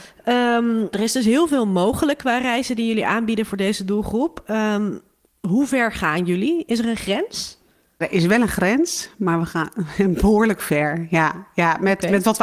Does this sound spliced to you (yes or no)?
yes